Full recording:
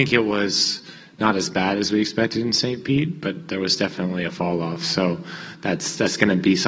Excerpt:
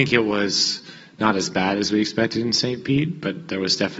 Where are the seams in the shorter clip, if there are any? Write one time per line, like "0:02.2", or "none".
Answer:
none